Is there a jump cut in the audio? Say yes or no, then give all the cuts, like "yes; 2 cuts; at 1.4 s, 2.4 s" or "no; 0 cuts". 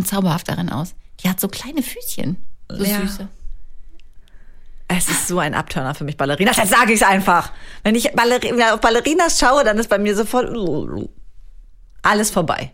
no; 0 cuts